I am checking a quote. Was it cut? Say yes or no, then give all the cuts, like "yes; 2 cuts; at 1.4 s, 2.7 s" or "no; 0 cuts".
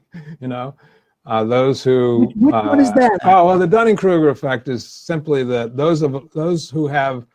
yes; 1 cut; at 3.2 s